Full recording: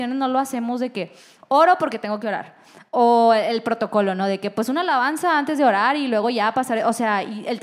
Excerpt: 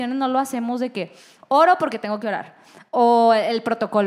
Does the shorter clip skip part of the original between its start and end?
no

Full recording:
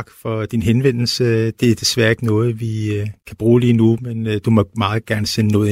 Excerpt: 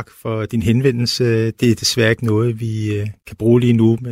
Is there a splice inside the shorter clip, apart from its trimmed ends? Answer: no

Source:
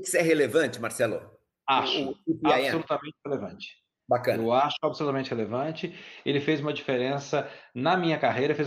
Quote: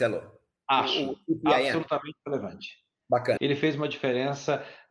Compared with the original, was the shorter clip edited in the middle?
yes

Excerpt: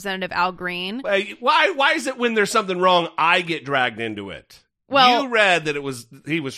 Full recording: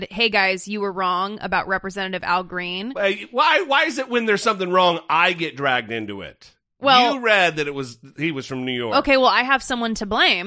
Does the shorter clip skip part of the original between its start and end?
no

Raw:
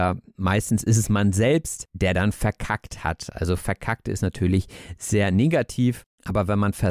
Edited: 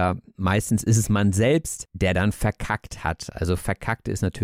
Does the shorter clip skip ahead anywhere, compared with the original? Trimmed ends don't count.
no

